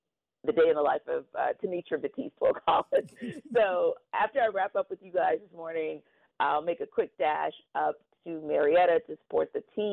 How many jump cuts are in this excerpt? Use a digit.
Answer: 0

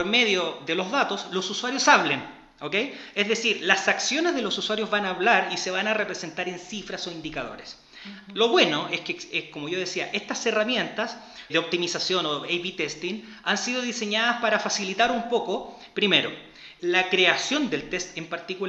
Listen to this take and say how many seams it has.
2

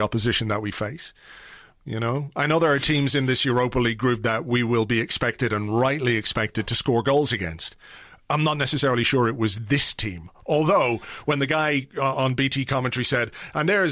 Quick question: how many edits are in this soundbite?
0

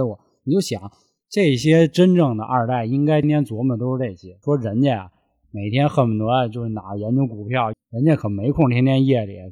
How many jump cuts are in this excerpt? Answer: 3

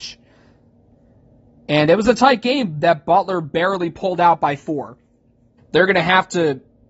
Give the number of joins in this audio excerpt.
1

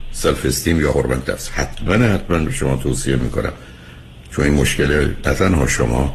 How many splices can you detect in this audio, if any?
0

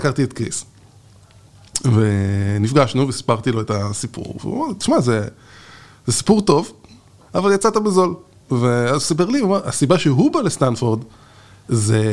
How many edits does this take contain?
1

